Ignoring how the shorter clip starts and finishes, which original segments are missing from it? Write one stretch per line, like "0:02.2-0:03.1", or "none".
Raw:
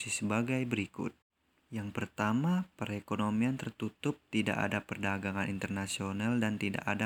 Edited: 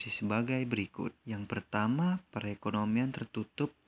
0:01.2-0:01.6